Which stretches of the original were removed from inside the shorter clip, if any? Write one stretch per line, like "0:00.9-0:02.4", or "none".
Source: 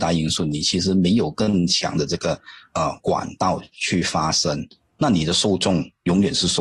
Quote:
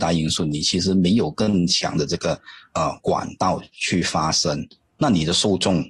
none